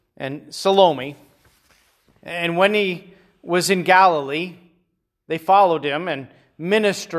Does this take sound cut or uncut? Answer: uncut